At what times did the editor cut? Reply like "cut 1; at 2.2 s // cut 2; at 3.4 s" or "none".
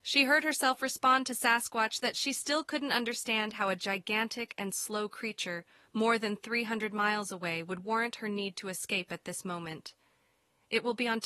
none